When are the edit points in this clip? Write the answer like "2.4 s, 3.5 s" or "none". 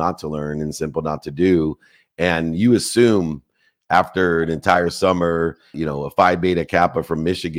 5.7 s